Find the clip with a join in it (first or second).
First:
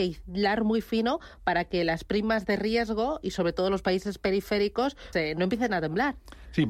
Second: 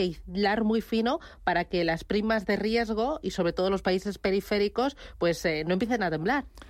first